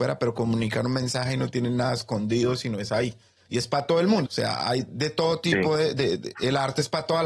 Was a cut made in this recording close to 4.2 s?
yes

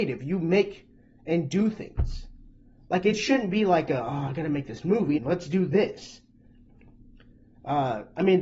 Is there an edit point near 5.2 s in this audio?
yes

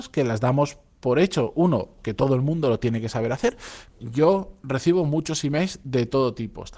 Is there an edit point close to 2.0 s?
yes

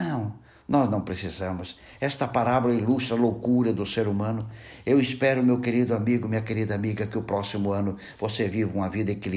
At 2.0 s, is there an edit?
no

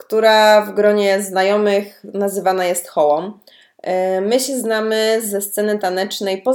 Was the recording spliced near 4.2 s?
no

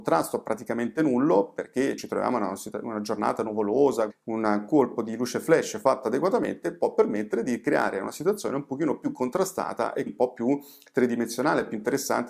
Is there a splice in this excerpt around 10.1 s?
yes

